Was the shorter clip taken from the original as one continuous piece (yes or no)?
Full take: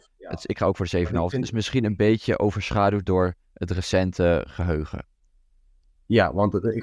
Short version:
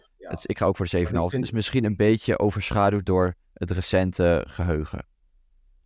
yes